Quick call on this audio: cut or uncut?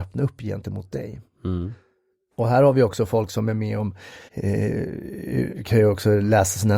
cut